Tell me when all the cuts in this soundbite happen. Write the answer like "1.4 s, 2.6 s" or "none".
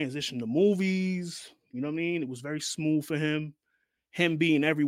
none